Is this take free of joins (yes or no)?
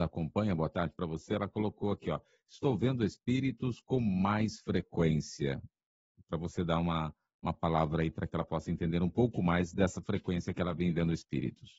yes